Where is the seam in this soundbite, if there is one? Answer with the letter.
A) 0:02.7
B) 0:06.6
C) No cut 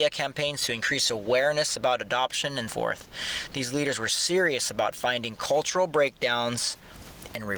A